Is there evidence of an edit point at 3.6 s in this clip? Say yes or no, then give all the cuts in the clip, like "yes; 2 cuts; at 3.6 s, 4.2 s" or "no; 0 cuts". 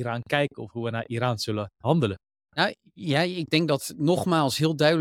no; 1 cut; at 2.4 s